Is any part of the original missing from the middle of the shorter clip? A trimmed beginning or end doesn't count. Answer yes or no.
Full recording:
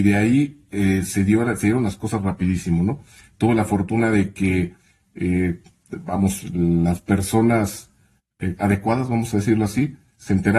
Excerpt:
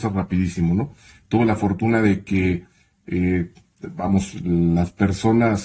no